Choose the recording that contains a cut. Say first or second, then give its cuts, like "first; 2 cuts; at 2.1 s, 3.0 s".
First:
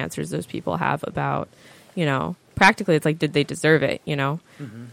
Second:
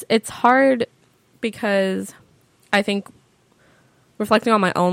first; 1 cut; at 2.5 s